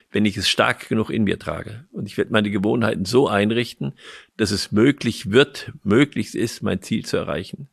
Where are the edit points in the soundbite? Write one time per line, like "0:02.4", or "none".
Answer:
none